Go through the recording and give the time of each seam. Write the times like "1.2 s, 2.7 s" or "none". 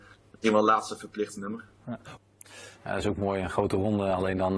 2.8 s